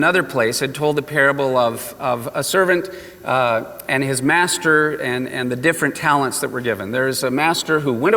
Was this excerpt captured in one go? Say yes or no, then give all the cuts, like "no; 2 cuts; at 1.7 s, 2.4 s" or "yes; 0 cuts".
yes; 0 cuts